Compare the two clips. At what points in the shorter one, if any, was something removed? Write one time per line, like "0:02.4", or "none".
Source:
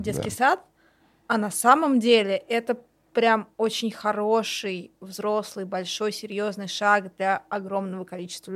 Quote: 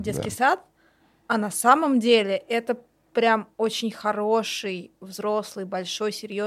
none